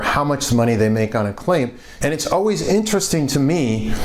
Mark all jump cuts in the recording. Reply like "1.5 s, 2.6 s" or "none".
2.0 s